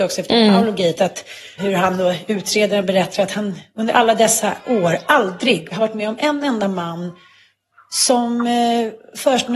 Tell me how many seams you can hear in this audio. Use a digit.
2